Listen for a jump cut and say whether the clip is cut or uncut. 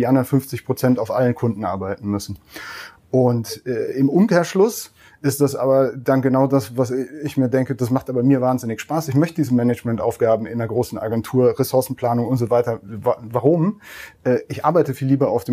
uncut